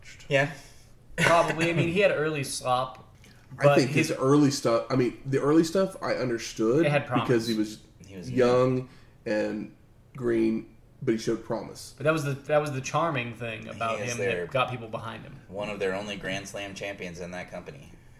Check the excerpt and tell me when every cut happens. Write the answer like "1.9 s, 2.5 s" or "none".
none